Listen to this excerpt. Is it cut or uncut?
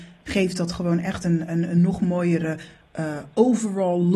uncut